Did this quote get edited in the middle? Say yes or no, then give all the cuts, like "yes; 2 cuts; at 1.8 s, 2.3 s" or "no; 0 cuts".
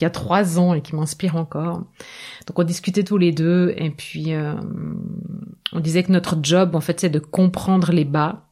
no; 0 cuts